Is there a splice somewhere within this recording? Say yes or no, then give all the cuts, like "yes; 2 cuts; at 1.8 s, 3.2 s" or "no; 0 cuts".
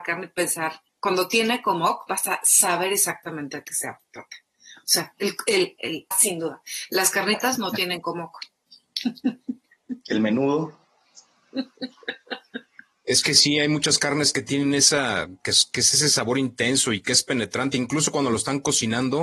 yes; 1 cut; at 6.1 s